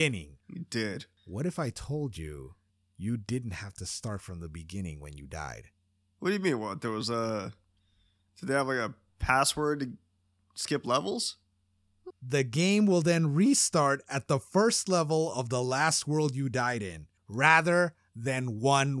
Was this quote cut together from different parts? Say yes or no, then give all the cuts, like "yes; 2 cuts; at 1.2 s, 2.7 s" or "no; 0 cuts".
yes; 2 cuts; at 12.1 s, 17.2 s